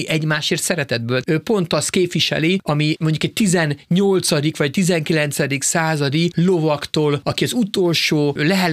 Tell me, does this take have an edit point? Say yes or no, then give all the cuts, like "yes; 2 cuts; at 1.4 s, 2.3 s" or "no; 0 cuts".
yes; 1 cut; at 1.2 s